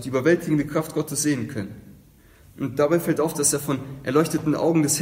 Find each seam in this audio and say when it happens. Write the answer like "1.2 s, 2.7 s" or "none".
none